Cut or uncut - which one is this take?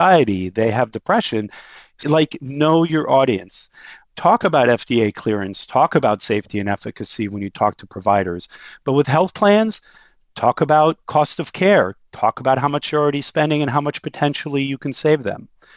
cut